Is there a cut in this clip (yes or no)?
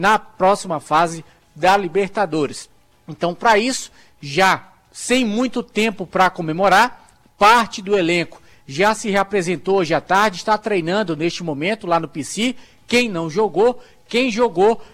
no